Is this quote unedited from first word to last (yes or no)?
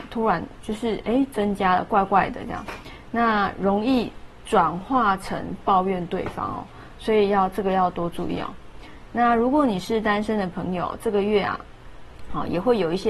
yes